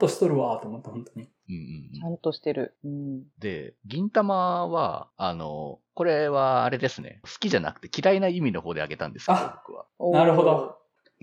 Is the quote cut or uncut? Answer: uncut